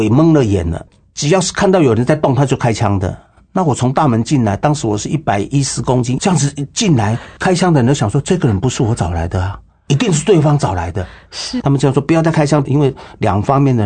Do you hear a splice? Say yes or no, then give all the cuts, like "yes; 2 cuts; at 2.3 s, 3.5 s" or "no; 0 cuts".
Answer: yes; 3 cuts; at 6.2 s, 11.6 s, 12.6 s